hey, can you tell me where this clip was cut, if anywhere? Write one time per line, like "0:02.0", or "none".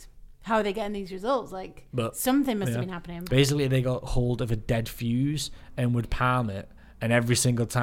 0:03.3